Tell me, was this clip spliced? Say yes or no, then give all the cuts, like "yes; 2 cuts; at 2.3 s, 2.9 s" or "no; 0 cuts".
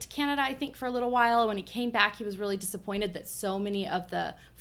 no; 0 cuts